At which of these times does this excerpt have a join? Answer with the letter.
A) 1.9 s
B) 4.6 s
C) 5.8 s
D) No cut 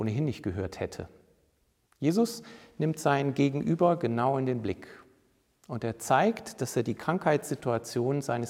A